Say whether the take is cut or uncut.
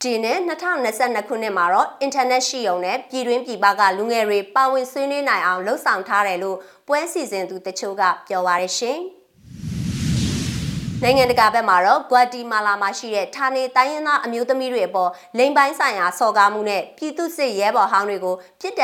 uncut